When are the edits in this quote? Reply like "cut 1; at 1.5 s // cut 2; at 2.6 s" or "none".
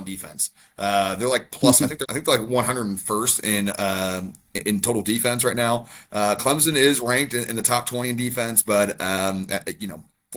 cut 1; at 2.0 s